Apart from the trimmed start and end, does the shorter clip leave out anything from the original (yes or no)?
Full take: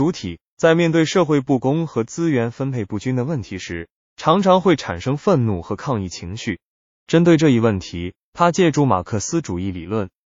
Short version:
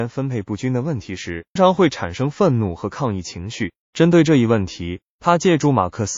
yes